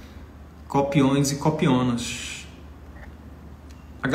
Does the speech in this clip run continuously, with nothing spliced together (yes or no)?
yes